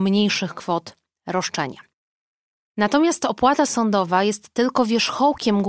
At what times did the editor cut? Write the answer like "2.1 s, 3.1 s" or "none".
none